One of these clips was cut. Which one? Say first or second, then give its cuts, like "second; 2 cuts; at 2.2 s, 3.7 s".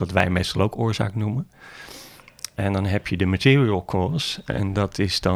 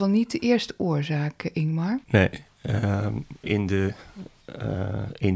second; 2 cuts; at 2.0 s, 3.4 s